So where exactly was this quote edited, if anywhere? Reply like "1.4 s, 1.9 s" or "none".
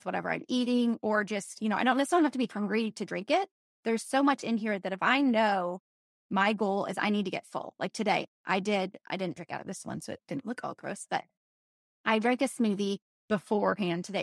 3.7 s